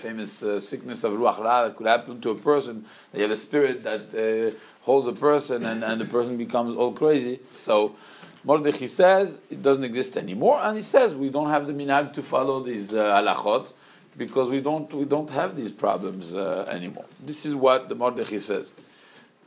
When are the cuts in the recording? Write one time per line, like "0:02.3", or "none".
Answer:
0:07.5